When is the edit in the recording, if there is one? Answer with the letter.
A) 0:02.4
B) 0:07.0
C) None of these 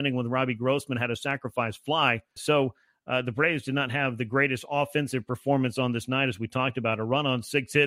A